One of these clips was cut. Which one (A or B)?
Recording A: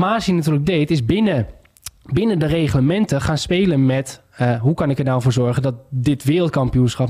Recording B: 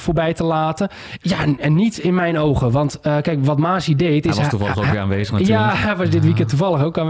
B